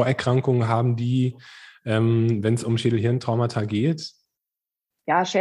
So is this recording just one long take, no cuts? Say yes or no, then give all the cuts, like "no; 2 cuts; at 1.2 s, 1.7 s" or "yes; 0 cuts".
yes; 0 cuts